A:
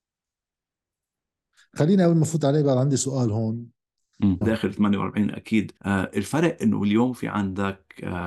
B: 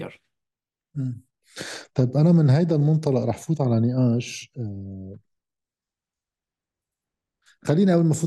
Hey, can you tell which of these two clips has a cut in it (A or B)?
A